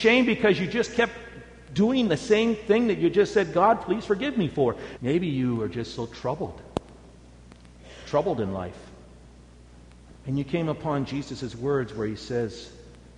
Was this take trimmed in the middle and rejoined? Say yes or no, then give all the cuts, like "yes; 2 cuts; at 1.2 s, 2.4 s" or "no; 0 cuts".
yes; 2 cuts; at 5.0 s, 10.1 s